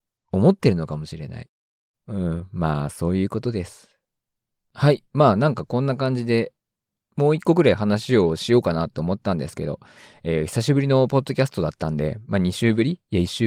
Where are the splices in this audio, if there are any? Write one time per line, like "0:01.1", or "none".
0:01.9